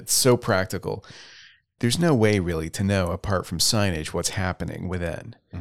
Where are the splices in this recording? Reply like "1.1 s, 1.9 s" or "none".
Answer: 1.8 s